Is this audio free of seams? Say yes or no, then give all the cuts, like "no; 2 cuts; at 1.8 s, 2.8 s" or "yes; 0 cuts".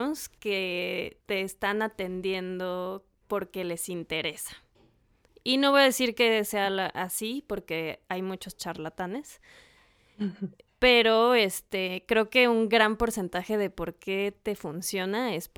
no; 1 cut; at 1.2 s